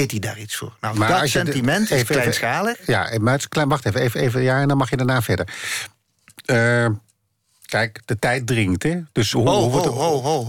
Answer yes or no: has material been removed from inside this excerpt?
yes